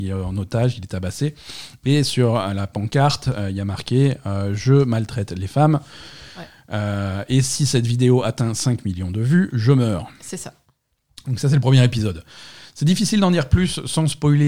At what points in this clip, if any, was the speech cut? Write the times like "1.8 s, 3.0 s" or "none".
none